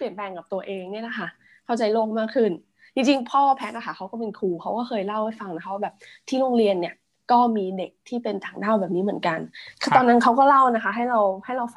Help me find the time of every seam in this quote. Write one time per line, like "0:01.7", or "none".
none